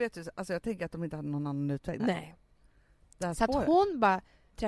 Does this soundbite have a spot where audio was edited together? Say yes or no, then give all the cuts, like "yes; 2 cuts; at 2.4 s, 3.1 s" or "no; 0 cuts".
yes; 1 cut; at 2.0 s